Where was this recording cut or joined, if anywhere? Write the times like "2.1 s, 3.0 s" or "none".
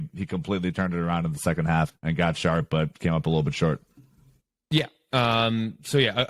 1.9 s